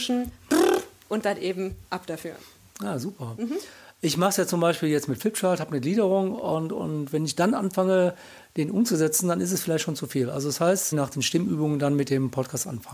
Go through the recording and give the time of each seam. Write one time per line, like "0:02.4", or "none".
0:01.9
0:03.4
0:10.9

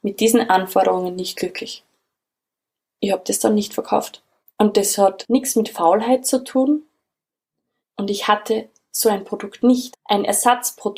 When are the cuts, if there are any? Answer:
0:07.8
0:09.9

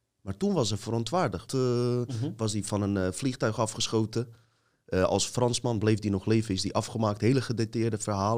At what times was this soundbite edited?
0:01.5

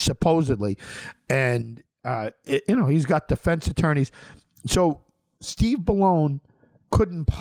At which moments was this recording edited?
none

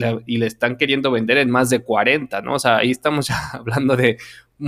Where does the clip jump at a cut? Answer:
none

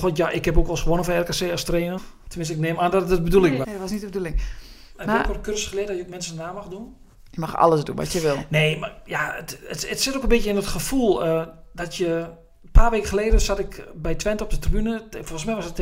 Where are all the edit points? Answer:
0:02.0
0:03.6

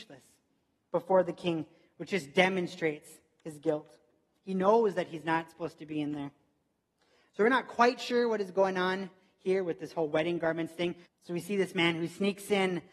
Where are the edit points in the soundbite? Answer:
0:11.1

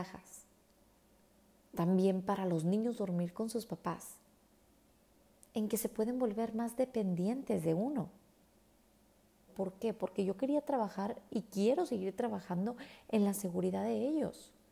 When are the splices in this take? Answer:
0:09.5

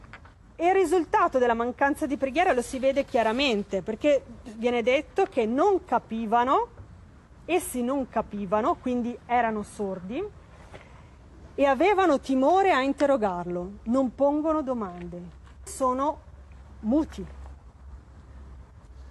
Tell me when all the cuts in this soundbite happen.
0:15.7

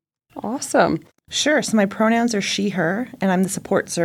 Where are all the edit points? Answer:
0:01.1

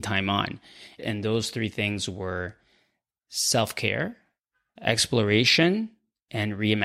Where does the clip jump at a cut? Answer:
0:01.0

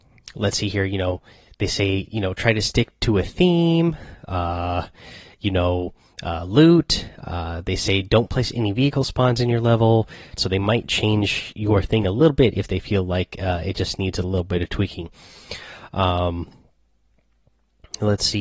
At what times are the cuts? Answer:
0:10.4

